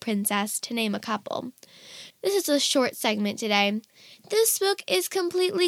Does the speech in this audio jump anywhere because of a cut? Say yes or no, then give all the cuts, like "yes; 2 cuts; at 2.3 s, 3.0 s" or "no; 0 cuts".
yes; 1 cut; at 2.1 s